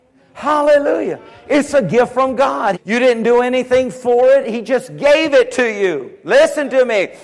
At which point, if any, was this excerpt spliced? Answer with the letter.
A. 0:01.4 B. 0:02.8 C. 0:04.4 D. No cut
B